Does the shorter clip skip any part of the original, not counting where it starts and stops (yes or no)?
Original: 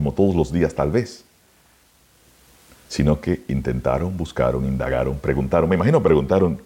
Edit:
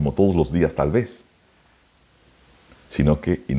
no